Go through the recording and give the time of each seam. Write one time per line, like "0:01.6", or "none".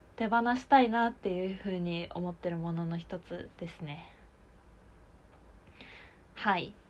0:03.5